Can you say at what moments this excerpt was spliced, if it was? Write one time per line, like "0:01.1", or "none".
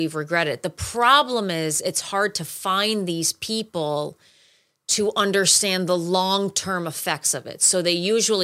none

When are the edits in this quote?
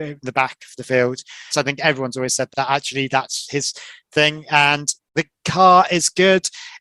0:01.5
0:02.5

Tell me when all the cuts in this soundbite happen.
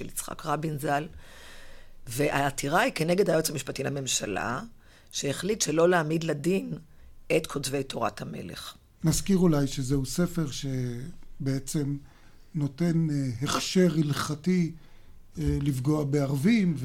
none

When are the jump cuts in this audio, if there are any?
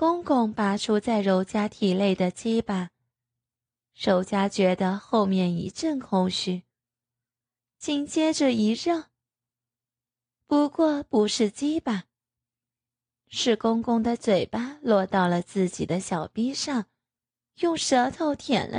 none

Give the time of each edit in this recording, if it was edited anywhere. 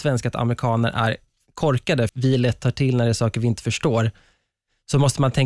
0:02.1

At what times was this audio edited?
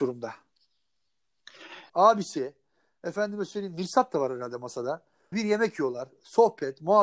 0:01.9
0:05.3

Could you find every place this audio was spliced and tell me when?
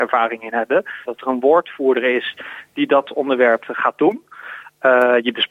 0:01.1
0:03.6

